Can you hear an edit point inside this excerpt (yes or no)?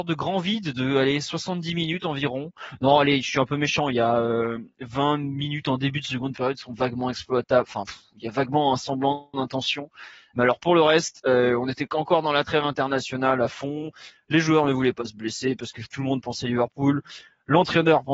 no